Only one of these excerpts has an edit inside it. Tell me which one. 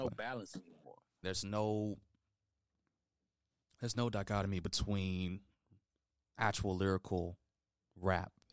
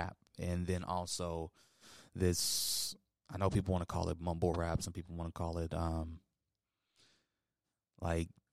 first; 1 cut; at 1.2 s

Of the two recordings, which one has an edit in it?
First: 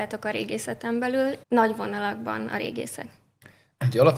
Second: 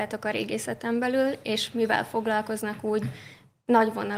first; 1 cut; at 1.4 s

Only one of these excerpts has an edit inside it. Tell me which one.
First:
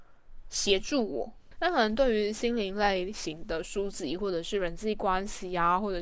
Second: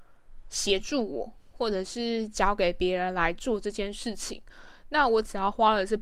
first; 1 cut; at 1.5 s

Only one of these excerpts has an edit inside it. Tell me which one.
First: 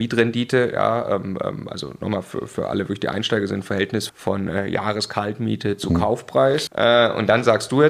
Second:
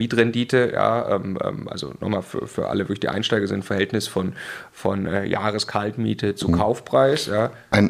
first; 2 cuts; at 4.1 s, 6.7 s

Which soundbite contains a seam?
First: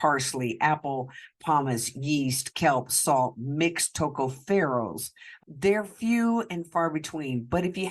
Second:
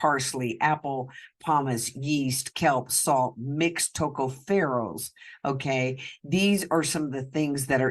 first; 1 cut; at 5.4 s

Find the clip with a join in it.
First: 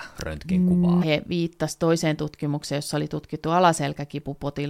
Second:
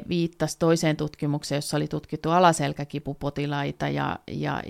first; 1 cut; at 1.0 s

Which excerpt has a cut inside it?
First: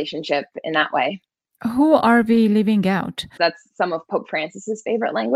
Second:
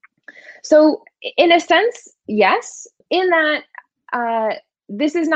first; 1 cut; at 3.4 s

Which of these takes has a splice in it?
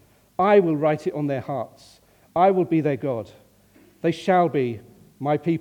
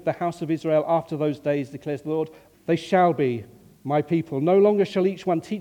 second; 1 cut; at 2.5 s

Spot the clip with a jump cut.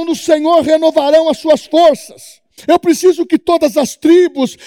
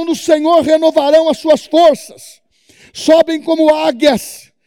first; 1 cut; at 2.6 s

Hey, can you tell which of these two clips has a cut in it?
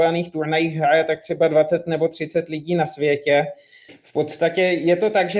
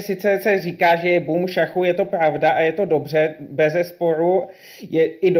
first; 1 cut; at 3.9 s

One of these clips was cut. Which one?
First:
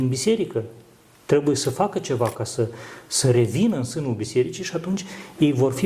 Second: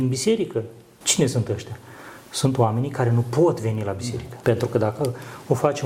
second; 2 cuts; at 1.0 s, 4.4 s

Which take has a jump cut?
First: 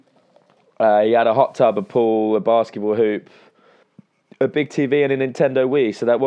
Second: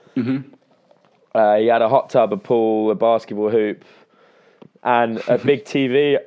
first; 1 cut; at 3.8 s

